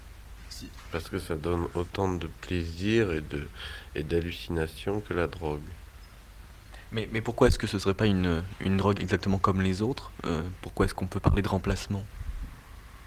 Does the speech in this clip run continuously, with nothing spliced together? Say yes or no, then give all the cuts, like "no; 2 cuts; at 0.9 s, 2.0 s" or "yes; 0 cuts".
no; 1 cut; at 9.0 s